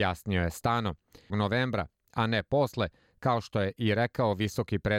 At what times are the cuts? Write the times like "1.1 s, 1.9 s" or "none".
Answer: 1.3 s